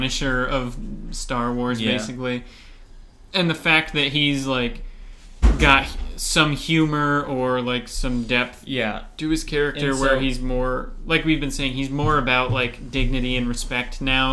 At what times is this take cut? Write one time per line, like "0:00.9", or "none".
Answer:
none